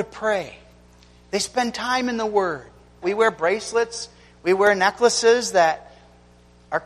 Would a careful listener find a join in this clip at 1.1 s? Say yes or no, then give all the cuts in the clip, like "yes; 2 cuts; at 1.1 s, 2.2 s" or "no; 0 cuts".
no; 1 cut; at 3.0 s